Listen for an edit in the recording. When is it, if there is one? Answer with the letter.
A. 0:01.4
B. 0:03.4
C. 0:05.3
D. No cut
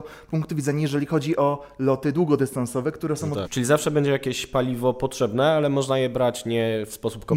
B